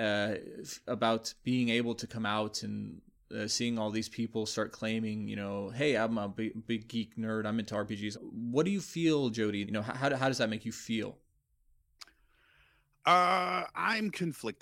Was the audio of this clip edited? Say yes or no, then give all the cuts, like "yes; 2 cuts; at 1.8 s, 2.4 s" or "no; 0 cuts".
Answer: yes; 2 cuts; at 8.1 s, 9.6 s